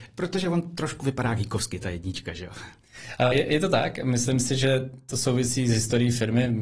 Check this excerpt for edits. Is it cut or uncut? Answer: uncut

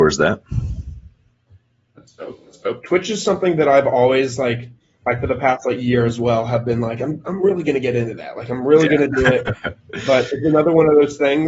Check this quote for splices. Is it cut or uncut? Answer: uncut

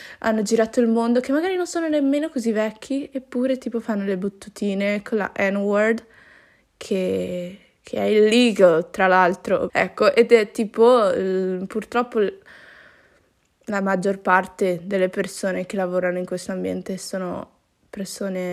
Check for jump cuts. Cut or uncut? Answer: cut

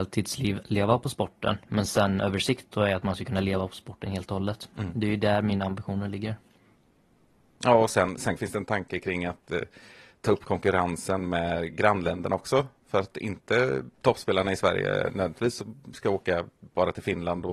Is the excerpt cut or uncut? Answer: cut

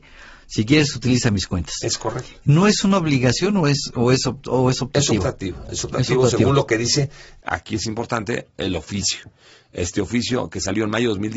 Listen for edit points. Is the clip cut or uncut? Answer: uncut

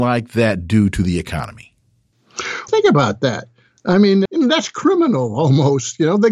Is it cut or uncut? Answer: cut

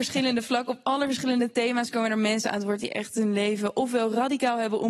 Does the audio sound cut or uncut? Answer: uncut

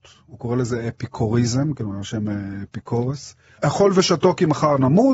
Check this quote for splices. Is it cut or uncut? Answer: uncut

